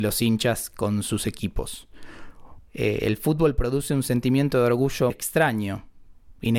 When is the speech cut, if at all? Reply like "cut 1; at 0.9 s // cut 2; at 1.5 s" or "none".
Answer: cut 1; at 2.6 s // cut 2; at 5.1 s